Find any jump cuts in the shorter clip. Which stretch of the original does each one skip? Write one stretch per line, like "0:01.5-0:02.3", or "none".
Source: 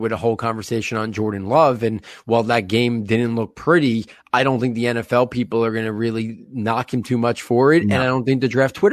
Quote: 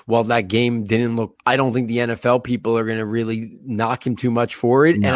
0:03.5-0:04.2

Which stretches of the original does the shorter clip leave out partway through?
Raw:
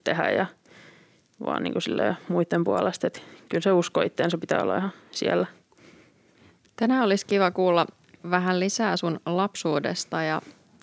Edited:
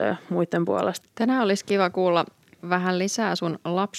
0:03.0-0:06.6

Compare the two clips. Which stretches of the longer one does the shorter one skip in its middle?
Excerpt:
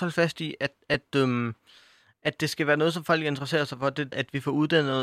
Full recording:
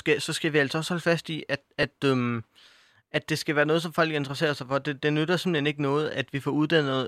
0:05.0-0:06.1

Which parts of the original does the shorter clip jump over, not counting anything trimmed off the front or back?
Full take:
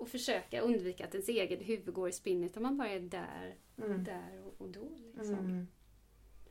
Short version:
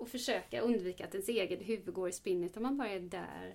none

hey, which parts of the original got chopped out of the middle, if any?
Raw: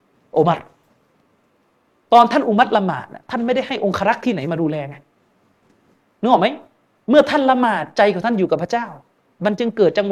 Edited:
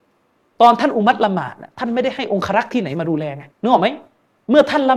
0:05.0-0:06.1

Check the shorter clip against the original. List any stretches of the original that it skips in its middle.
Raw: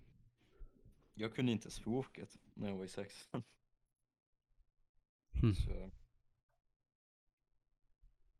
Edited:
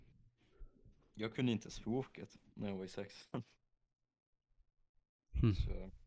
none

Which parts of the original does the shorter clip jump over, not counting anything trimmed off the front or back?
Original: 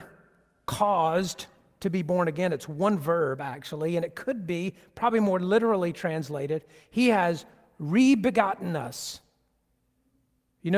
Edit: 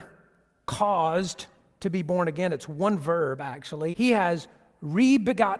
0:03.9-0:06.9

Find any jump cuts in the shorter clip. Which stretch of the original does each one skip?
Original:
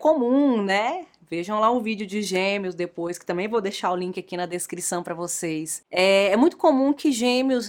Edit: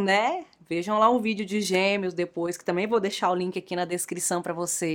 none

